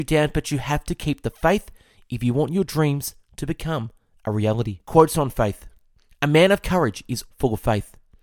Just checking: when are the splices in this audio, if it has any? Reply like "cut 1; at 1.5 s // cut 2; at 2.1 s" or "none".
cut 1; at 4.8 s // cut 2; at 7.3 s